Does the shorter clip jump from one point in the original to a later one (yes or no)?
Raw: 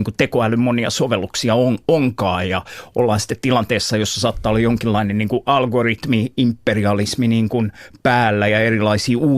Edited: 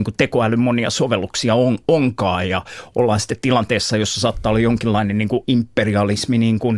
yes